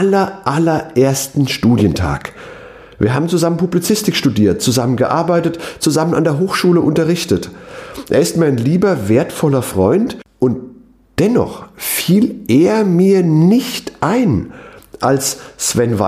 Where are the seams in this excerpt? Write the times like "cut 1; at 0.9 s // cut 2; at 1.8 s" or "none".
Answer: none

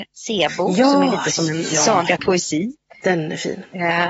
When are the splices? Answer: cut 1; at 2.2 s

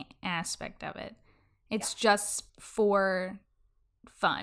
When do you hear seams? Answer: cut 1; at 2.5 s

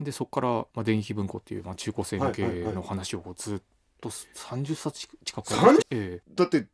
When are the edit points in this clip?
cut 1; at 5.8 s

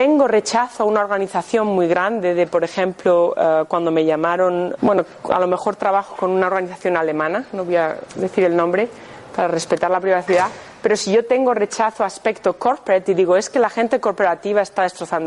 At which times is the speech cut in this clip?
cut 1; at 4.8 s

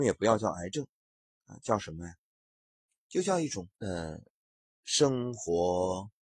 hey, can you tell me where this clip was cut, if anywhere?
cut 1; at 3.8 s

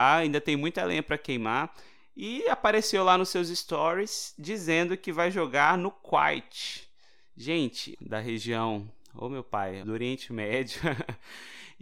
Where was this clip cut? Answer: cut 1; at 7.9 s // cut 2; at 9.8 s

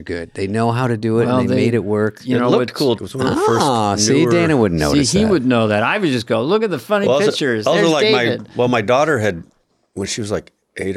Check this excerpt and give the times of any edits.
cut 1; at 3.0 s

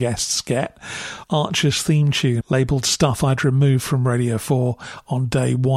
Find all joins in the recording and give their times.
cut 1; at 1.2 s // cut 2; at 2.4 s

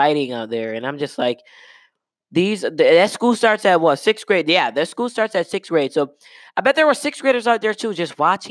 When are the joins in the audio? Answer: none

